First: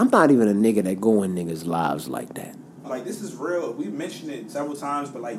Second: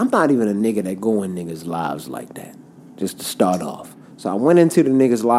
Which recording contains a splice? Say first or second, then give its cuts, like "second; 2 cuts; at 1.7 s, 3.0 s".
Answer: first; 2 cuts; at 2.8 s, 4.5 s